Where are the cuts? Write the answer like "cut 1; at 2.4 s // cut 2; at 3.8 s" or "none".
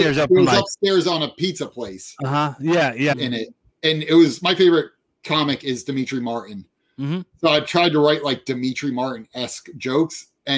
cut 1; at 3.1 s